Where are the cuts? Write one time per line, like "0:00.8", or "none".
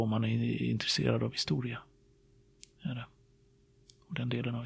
none